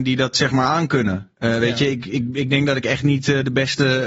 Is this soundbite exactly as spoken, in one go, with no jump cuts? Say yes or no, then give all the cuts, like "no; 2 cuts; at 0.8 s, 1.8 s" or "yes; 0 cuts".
yes; 0 cuts